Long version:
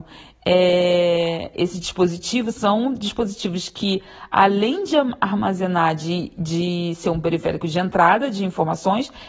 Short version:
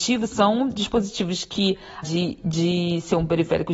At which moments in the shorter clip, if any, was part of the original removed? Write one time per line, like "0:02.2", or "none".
0:02.0

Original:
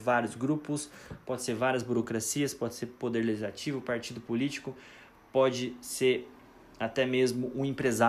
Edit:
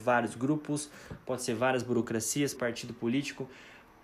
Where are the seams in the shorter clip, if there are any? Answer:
0:02.5

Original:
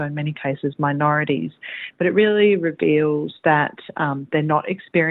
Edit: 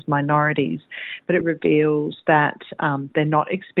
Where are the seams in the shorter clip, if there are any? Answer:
0:01.4

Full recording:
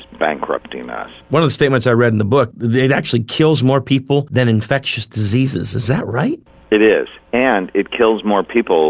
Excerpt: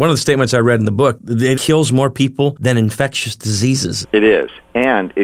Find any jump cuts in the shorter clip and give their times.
0:01.5
0:04.0

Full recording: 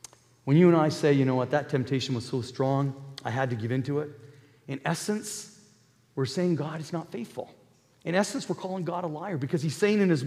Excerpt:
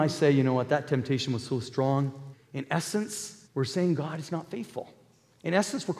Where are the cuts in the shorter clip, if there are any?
0:02.3
0:03.4

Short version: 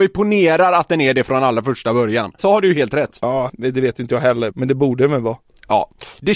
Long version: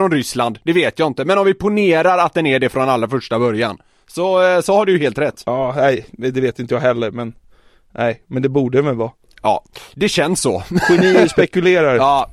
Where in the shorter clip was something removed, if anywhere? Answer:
0:02.4
0:03.5
0:04.5

